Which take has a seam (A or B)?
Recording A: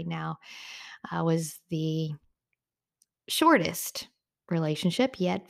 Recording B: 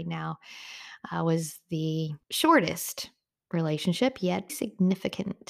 B